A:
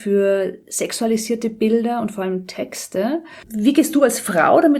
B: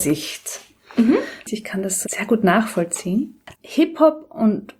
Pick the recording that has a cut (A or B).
B